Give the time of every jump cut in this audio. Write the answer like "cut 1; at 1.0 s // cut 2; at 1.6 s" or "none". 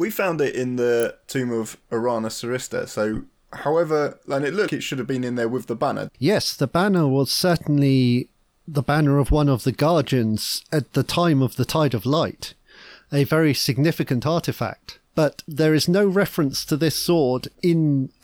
cut 1; at 4.7 s // cut 2; at 6.1 s